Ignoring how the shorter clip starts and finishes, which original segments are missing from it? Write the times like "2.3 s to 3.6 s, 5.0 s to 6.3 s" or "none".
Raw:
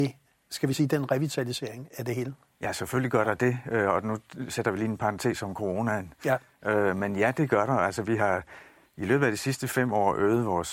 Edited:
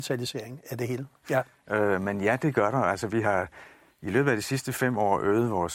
2.5 s to 6.2 s